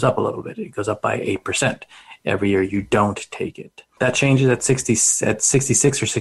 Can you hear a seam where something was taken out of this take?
yes; 1 cut; at 4.0 s

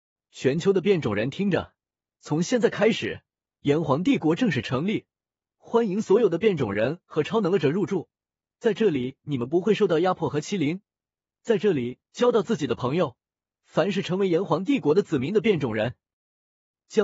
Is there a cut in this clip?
yes; 1 cut; at 12.0 s

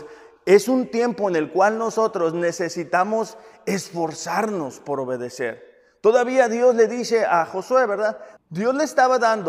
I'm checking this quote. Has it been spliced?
yes; 1 cut; at 8.4 s

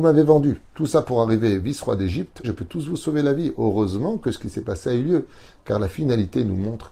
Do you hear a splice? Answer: yes; 1 cut; at 2.4 s

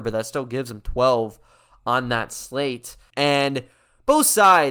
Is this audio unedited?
no; 1 cut; at 3.1 s

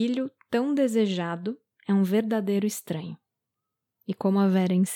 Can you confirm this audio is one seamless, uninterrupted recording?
yes; 0 cuts

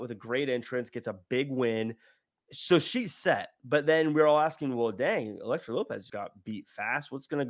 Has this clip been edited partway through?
yes; 1 cut; at 6.1 s

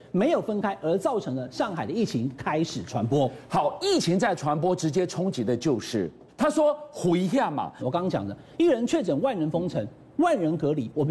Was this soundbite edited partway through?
yes; 2 cuts; at 6.3 s, 7.8 s

